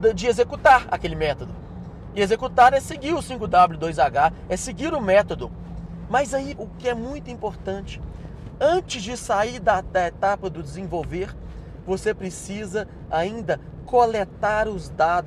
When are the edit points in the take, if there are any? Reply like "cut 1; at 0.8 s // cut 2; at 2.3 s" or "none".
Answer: cut 1; at 6.6 s

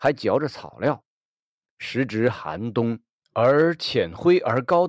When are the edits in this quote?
cut 1; at 3.2 s

